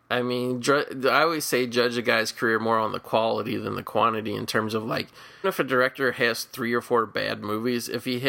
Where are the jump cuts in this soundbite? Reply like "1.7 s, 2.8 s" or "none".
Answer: 5.4 s